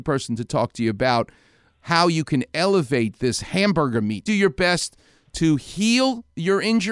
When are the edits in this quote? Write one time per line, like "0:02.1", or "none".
0:04.3